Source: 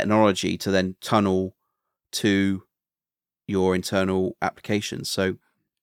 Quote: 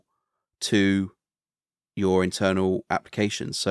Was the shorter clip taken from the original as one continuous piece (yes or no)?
yes